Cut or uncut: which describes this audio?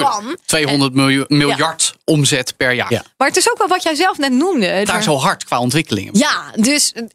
cut